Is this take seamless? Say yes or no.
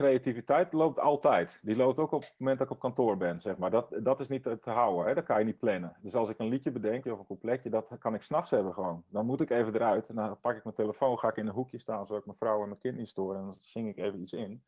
no